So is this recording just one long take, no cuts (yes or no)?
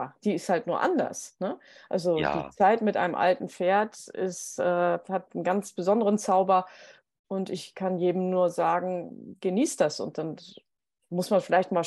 yes